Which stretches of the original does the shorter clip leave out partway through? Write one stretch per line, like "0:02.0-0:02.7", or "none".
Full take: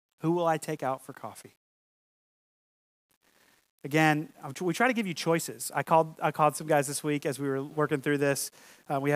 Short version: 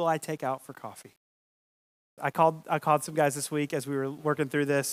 0:02.6-0:05.7